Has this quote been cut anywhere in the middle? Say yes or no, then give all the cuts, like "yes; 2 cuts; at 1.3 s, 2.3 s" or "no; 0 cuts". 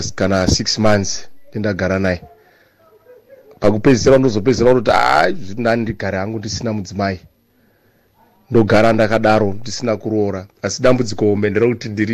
yes; 1 cut; at 10.5 s